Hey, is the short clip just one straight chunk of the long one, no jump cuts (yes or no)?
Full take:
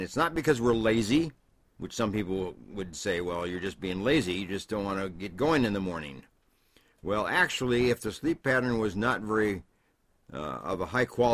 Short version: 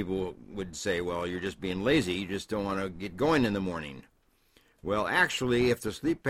yes